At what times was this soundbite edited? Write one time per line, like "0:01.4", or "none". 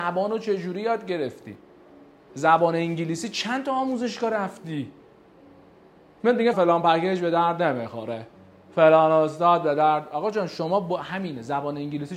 0:06.5